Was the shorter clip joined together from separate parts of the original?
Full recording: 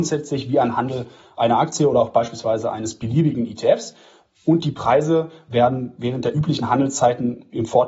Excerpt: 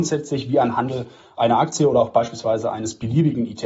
no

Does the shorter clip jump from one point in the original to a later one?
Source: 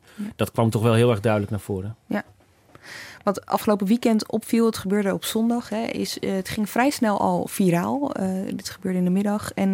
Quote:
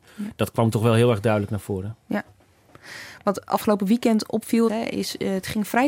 yes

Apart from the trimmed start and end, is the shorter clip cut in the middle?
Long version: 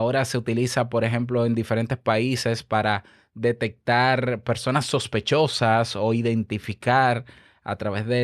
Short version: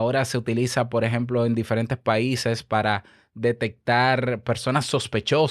no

